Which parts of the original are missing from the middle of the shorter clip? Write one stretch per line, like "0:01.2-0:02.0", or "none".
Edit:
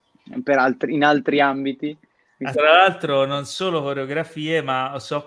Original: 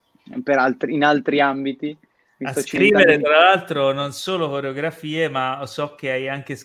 0:02.5-0:03.2